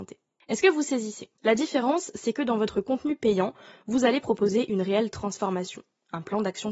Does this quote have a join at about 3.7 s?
no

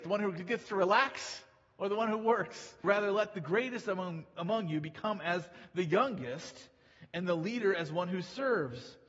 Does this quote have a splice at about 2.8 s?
yes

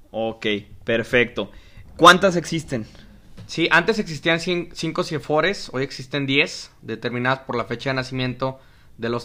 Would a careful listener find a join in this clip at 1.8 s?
yes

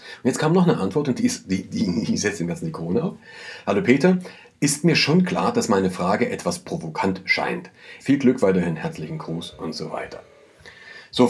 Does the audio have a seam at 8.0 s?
yes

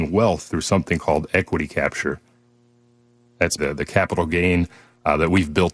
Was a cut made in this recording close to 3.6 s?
yes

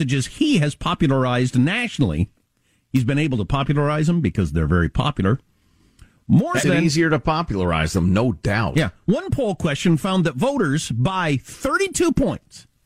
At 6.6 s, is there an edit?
yes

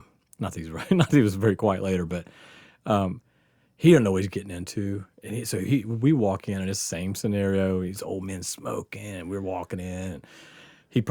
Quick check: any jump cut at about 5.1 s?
no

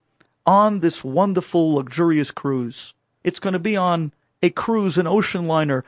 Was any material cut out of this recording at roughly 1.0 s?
no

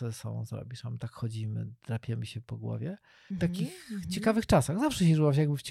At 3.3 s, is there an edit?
yes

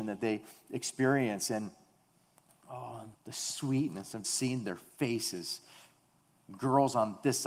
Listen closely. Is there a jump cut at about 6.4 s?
no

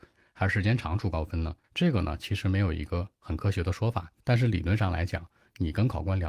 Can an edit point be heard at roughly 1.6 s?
yes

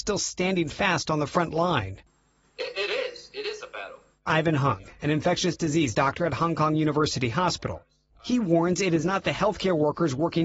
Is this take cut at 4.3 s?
yes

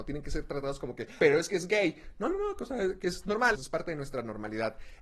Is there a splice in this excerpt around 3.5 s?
yes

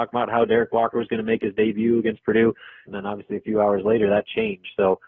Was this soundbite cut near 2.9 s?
yes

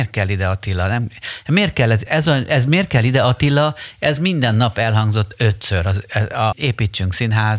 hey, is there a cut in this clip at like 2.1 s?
yes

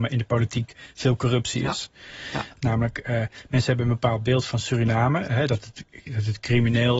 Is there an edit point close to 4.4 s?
no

